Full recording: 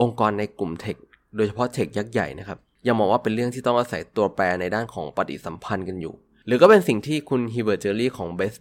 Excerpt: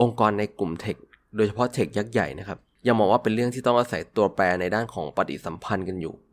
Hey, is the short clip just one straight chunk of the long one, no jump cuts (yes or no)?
yes